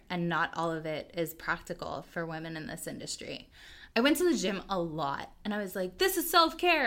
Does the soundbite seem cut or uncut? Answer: cut